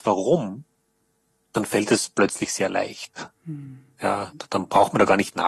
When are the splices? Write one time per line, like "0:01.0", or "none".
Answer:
none